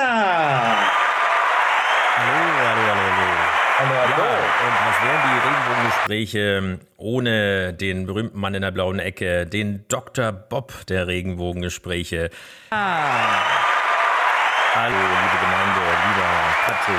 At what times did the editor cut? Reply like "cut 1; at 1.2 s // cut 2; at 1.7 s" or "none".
cut 1; at 12.7 s // cut 2; at 14.9 s